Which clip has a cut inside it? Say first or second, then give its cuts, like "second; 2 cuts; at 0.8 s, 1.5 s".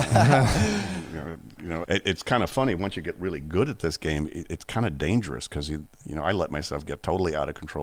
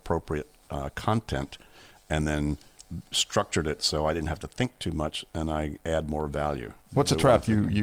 first; 1 cut; at 1.8 s